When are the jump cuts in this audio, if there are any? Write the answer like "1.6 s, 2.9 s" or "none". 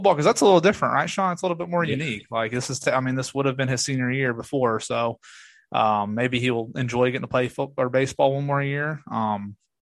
none